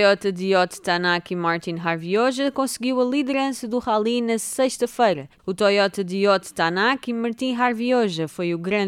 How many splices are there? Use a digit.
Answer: 1